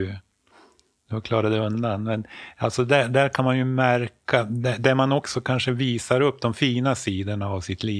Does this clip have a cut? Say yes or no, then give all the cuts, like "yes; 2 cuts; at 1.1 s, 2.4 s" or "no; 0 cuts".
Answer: no; 0 cuts